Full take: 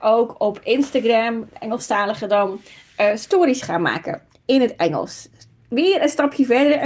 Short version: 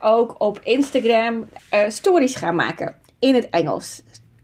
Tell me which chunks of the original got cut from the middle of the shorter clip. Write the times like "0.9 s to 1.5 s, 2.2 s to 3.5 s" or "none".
1.6 s to 2.9 s